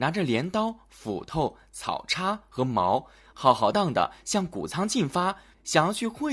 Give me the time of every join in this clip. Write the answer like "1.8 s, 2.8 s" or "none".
3.7 s